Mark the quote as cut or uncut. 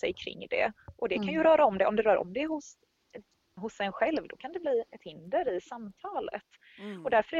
cut